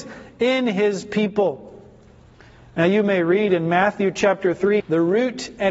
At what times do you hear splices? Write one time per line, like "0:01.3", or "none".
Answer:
0:04.8